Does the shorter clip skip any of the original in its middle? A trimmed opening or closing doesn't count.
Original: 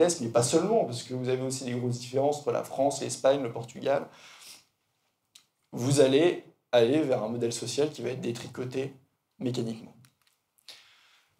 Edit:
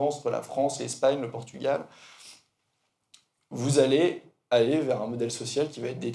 no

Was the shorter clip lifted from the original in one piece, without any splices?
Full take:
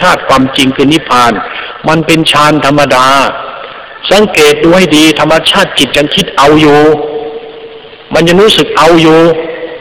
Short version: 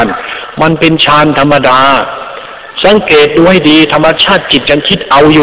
yes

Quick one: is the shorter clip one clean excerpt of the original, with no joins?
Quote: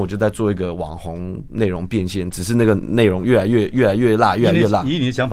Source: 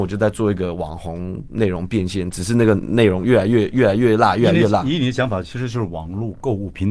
yes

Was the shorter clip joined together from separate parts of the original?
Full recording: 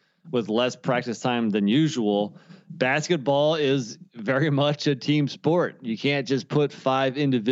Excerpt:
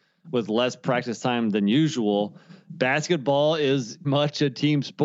yes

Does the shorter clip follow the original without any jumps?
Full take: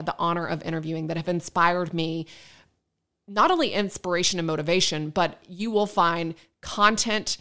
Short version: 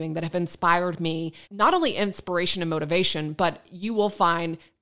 no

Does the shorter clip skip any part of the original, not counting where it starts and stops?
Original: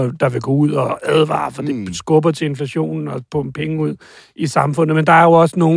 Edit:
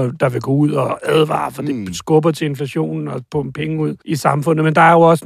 yes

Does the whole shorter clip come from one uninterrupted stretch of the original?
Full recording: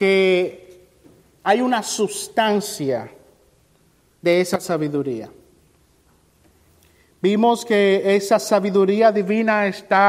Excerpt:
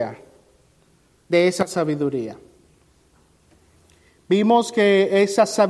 yes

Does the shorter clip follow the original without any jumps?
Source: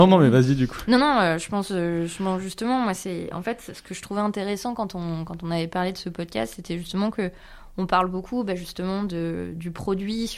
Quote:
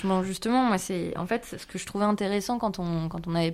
yes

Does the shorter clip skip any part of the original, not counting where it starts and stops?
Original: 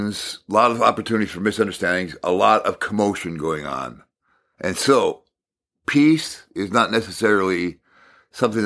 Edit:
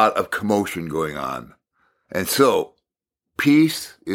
no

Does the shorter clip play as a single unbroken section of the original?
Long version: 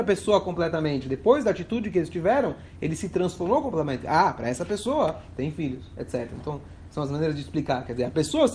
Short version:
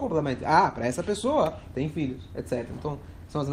yes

